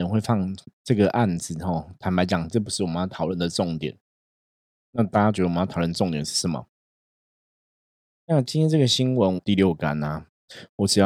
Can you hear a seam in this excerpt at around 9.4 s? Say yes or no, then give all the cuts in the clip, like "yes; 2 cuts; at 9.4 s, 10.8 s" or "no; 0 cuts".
yes; 2 cuts; at 8.1 s, 9.4 s